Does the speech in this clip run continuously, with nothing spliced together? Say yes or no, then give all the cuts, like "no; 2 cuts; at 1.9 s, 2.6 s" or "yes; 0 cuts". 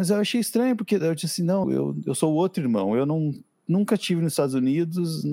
no; 1 cut; at 1.6 s